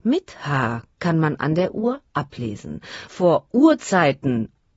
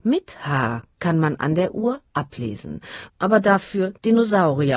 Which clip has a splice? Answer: second; 1 cut; at 3.1 s

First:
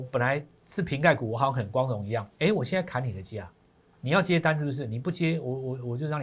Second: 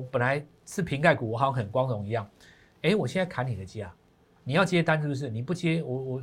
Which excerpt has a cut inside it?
first; 1 cut; at 2.3 s

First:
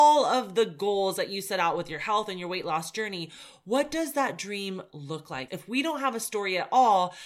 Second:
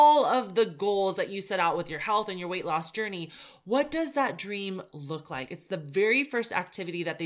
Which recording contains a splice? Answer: first; 1 cut; at 5.5 s

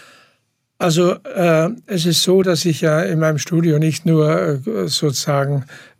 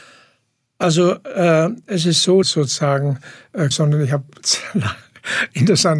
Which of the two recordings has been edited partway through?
second; 2 cuts; at 2.4 s, 3.7 s

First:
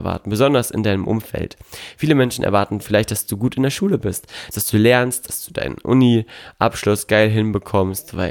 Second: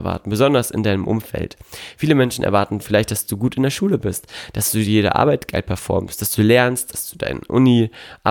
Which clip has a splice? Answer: first; 1 cut; at 4.5 s

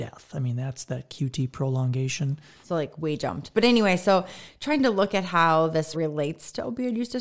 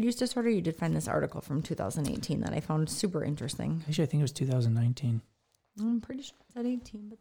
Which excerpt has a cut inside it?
first; 2 cuts; at 2.6 s, 5.9 s

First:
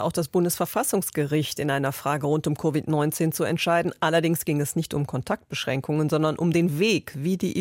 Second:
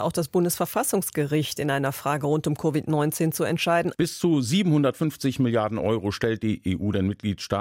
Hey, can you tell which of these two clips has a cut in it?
second; 1 cut; at 3.9 s

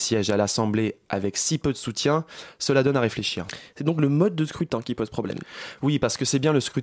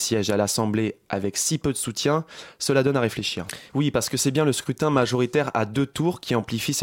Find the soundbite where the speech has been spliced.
second; 1 cut; at 3.7 s

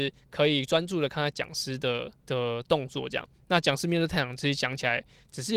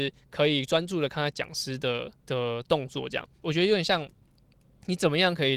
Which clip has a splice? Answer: second; 1 cut; at 3.4 s

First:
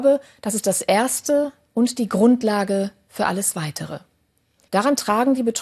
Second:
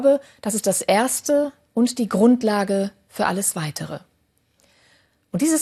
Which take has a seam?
first; 1 cut; at 4.7 s

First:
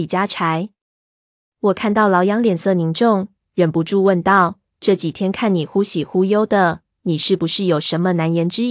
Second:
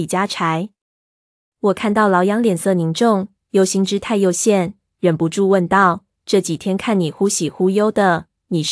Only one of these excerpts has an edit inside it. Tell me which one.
first; 1 cut; at 3.4 s

